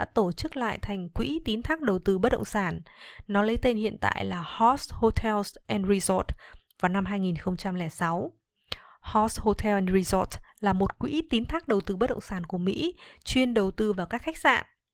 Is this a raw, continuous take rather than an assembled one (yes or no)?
yes